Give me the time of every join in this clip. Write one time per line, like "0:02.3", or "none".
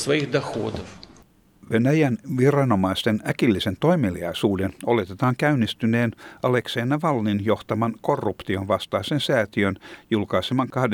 none